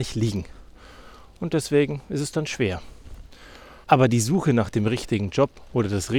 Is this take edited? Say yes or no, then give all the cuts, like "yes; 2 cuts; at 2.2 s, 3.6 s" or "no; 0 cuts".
yes; 1 cut; at 3.8 s